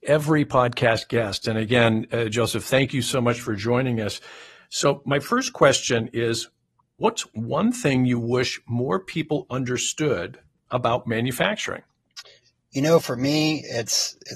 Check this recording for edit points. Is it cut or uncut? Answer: uncut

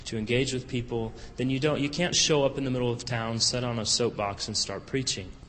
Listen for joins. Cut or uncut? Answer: cut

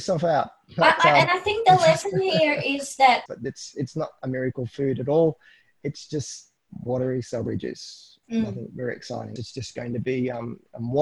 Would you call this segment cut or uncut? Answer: cut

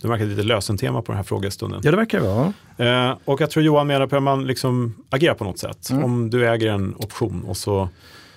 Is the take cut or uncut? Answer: uncut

